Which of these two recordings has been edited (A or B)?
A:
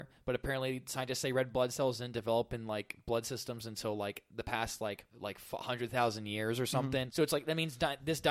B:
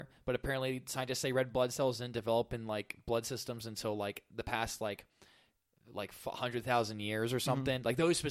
A